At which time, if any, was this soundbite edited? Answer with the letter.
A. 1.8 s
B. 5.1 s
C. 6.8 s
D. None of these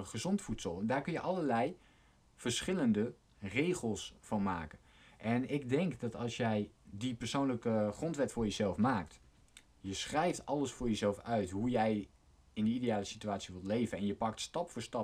C